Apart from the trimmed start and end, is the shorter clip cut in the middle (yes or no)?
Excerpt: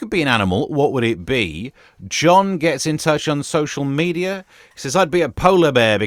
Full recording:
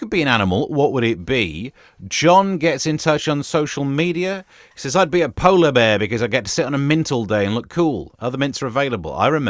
no